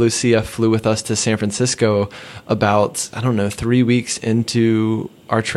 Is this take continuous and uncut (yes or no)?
no